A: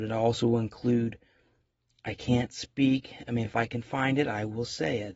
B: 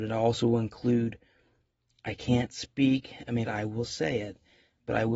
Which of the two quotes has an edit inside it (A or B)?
B